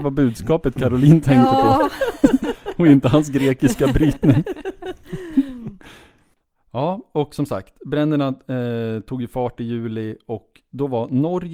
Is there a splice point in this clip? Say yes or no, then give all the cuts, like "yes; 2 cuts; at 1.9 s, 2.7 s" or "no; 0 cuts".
no; 0 cuts